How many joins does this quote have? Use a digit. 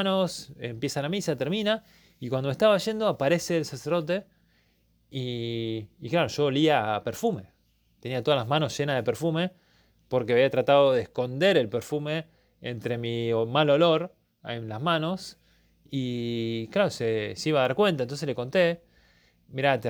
0